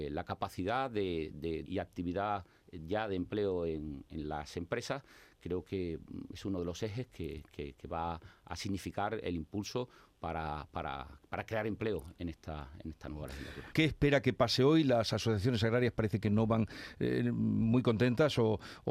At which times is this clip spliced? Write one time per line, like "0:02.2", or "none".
0:01.7
0:13.7